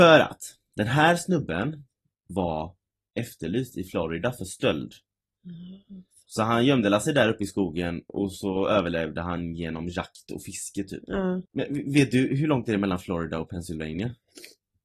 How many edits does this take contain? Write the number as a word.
one